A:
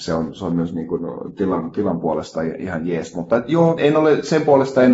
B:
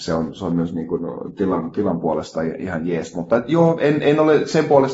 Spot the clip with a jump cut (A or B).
A